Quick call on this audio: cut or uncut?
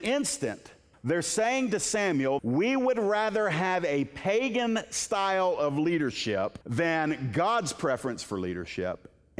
cut